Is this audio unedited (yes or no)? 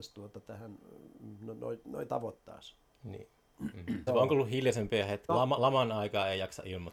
no